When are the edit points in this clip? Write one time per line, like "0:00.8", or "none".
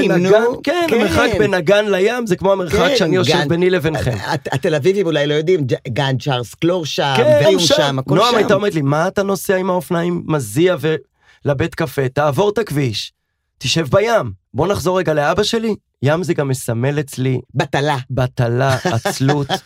0:07.4
0:14.4
0:17.5

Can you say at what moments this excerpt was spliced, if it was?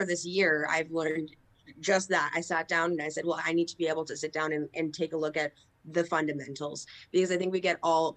none

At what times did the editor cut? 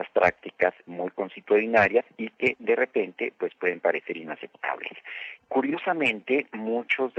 0:05.4

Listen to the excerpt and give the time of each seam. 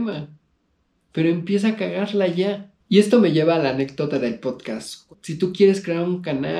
0:05.1

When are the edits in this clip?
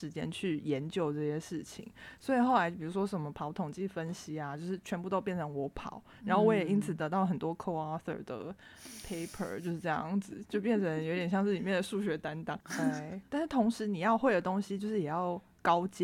0:12.6

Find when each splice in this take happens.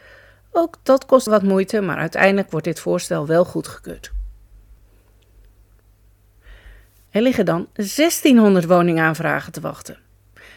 0:01.3
0:07.1

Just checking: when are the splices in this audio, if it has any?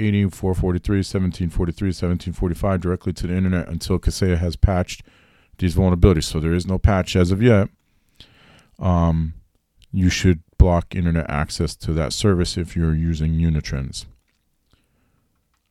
none

